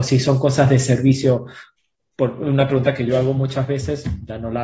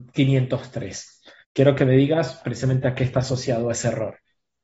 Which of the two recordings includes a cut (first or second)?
second